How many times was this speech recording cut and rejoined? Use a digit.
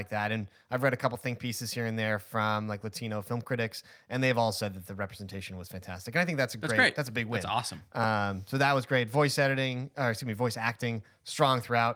0